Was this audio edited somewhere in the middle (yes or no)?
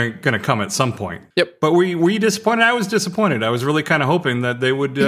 no